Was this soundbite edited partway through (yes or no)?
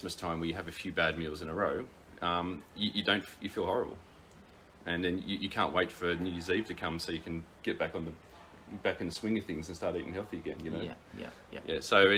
no